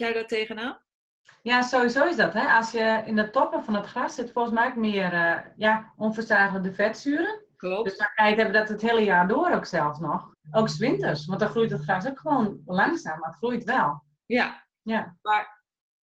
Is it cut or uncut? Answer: cut